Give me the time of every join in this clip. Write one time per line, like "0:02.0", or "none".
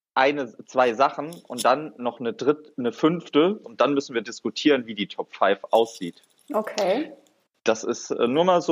0:03.6

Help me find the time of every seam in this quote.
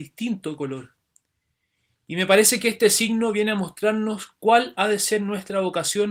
none

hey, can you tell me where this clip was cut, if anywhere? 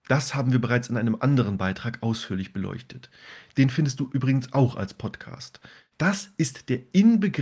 0:05.9

